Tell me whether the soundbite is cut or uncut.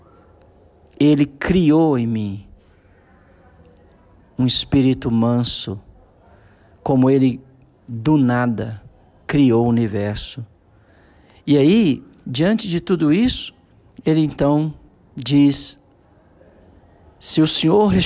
uncut